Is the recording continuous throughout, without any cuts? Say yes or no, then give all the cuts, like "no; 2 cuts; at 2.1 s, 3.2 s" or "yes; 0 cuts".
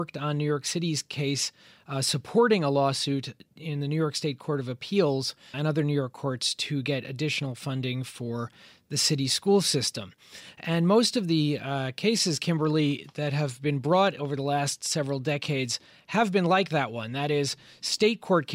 no; 1 cut; at 5.5 s